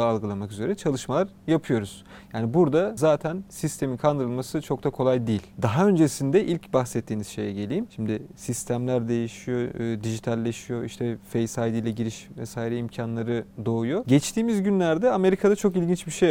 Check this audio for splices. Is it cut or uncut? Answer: uncut